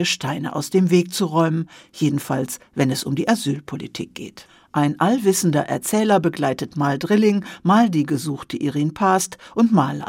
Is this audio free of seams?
yes; 0 cuts

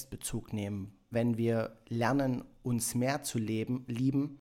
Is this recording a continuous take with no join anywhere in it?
no; 1 cut; at 1.1 s

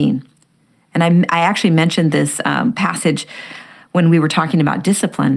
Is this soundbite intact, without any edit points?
yes; 0 cuts

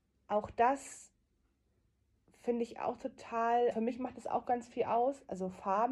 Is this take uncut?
no; 1 cut; at 3.7 s

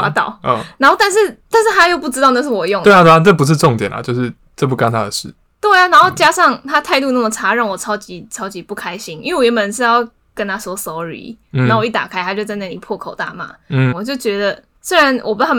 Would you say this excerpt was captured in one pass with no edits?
no; 1 cut; at 13.9 s

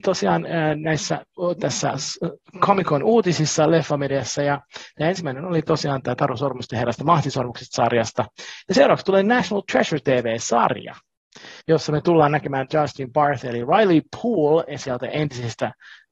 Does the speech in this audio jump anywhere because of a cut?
yes; 1 cut; at 11.6 s

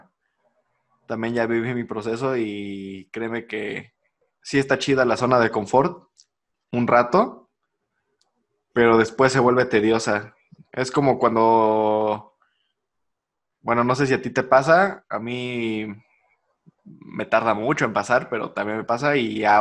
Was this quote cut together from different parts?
no; 0 cuts

